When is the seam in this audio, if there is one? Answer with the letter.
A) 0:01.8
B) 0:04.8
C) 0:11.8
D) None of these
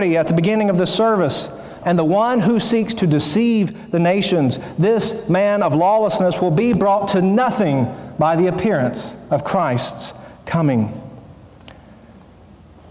A